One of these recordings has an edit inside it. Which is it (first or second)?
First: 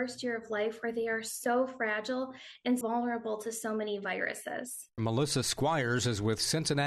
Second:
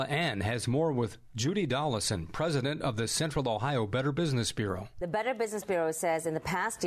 first